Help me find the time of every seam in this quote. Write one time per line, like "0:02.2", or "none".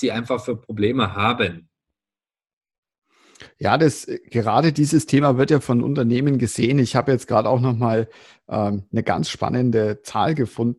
none